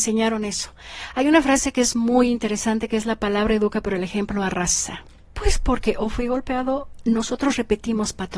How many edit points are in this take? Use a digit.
1